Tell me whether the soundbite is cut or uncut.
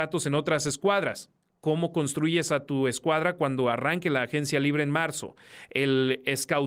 uncut